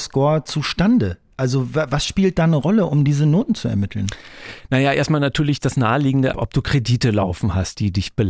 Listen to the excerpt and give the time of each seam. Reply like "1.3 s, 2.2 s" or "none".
6.3 s